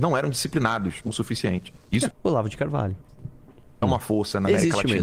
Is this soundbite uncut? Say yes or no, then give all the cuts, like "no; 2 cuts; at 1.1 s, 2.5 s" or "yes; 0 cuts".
no; 2 cuts; at 2.1 s, 3.8 s